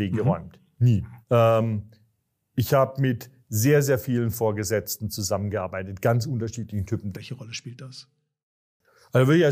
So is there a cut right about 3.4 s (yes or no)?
no